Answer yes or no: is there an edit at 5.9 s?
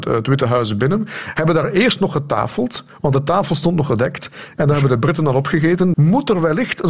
yes